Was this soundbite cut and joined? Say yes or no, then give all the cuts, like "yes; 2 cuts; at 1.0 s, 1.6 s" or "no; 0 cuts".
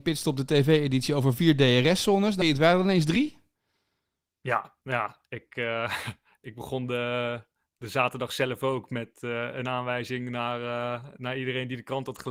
yes; 1 cut; at 2.4 s